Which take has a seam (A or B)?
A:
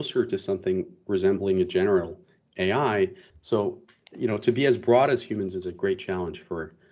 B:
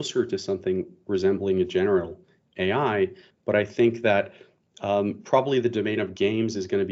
A